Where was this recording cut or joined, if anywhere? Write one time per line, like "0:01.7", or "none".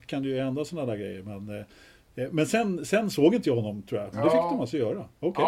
0:04.1